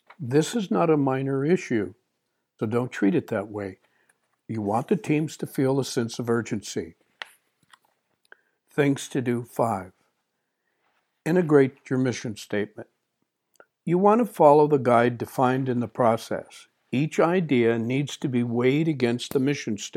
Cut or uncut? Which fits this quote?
cut